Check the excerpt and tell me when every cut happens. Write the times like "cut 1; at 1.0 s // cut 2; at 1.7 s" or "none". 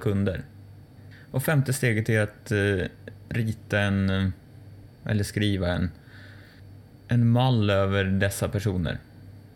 none